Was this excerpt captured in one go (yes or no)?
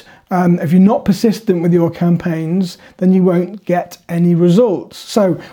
yes